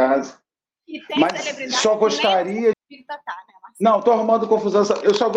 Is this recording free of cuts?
no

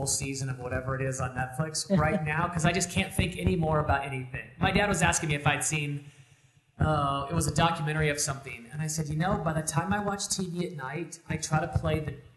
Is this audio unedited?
yes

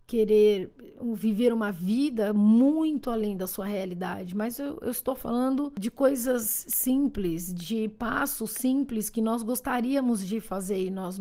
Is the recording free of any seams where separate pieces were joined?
yes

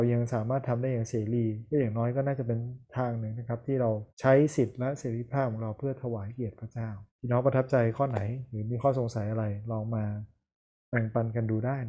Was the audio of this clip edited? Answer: yes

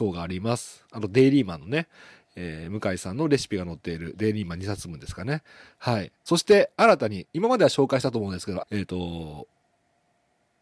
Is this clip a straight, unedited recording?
no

